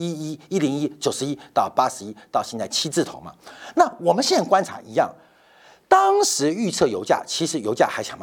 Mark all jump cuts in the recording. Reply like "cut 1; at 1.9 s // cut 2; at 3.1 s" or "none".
none